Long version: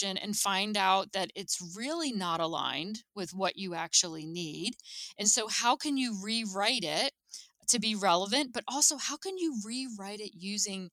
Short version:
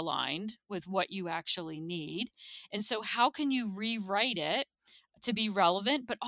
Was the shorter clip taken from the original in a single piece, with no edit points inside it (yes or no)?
yes